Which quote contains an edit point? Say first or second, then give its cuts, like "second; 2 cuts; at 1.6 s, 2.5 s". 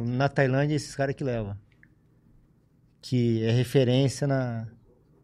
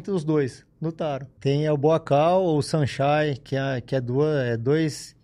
second; 1 cut; at 1.4 s